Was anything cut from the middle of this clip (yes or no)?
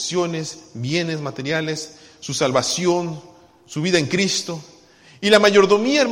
no